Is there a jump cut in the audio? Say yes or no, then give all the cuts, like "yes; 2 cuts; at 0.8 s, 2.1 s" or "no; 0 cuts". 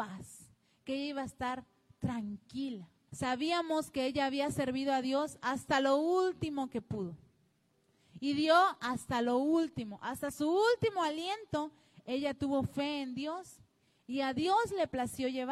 yes; 1 cut; at 3.1 s